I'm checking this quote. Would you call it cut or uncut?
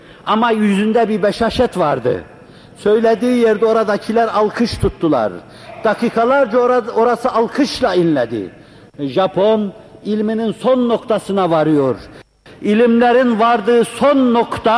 uncut